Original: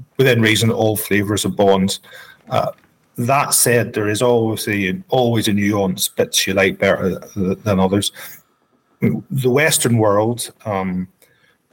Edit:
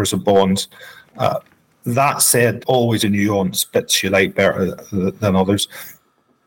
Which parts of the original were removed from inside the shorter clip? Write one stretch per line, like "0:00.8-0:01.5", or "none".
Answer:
0:03.9-0:05.0